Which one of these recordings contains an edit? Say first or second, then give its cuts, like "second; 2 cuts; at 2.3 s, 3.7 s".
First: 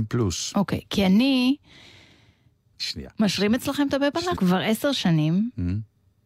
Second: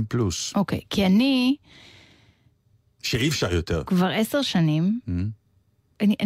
first; 2 cuts; at 2.7 s, 4.4 s